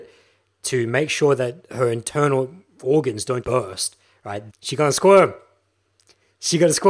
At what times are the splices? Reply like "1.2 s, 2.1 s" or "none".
3.4 s, 4.5 s